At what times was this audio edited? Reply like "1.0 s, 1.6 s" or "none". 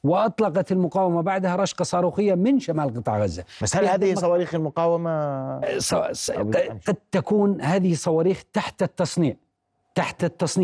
none